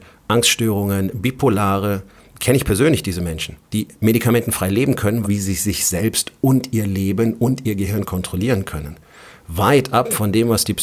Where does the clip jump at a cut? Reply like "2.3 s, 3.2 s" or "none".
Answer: 3.6 s, 5.2 s

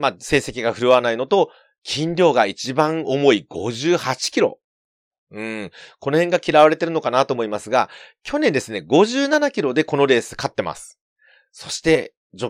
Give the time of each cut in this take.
none

